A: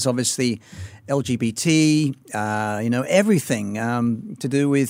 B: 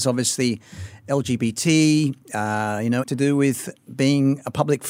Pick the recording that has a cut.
B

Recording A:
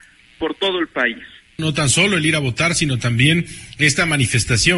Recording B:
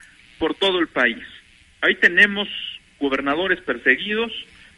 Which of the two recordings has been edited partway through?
A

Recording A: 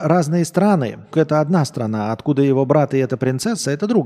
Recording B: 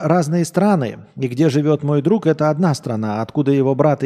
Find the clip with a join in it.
A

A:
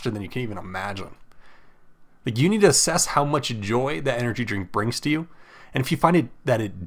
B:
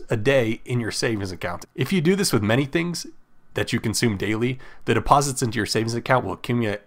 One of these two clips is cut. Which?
B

